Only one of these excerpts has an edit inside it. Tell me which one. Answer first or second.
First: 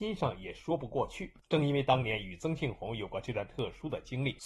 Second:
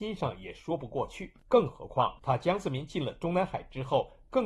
first